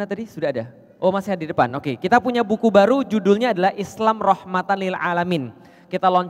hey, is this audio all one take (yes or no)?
yes